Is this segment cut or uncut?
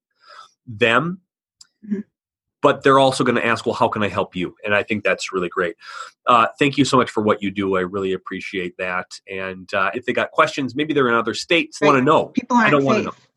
cut